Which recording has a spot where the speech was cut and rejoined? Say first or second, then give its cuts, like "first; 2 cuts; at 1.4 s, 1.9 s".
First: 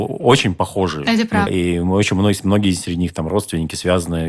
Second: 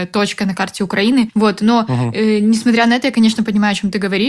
first; 1 cut; at 1.5 s